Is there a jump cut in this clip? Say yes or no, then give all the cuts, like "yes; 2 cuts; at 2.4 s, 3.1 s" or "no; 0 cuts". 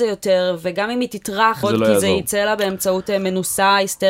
yes; 1 cut; at 1.6 s